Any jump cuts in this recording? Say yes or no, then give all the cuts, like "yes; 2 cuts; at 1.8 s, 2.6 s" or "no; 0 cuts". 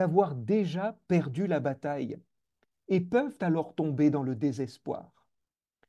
no; 0 cuts